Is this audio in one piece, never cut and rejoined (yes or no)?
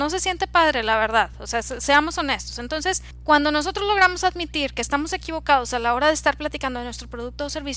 yes